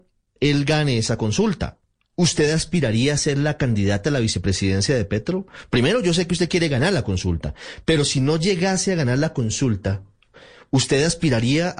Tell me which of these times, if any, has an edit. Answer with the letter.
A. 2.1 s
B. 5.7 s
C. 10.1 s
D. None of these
D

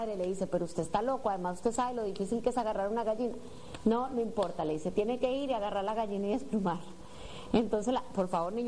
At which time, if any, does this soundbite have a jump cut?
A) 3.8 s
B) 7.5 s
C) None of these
C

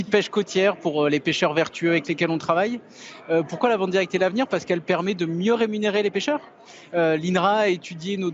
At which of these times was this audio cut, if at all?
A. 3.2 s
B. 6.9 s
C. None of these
C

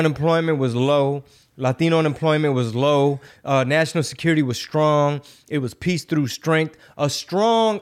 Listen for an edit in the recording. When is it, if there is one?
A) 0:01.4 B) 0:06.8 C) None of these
C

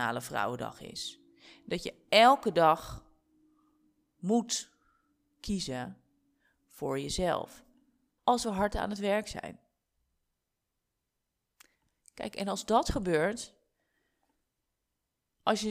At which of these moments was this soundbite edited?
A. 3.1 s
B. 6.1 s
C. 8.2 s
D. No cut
C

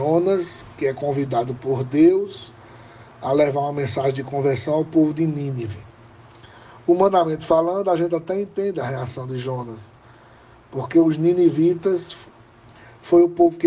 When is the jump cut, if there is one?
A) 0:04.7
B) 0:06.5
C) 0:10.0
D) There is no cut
D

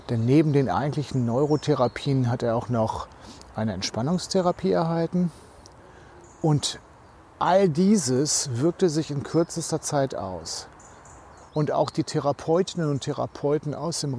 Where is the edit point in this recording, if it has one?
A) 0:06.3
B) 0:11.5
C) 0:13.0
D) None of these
B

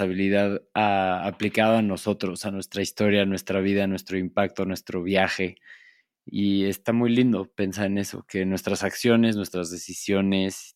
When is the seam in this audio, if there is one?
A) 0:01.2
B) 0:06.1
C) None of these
C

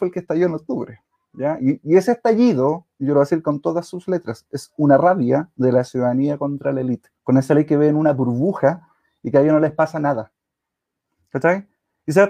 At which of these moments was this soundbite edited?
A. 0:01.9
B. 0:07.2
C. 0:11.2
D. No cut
B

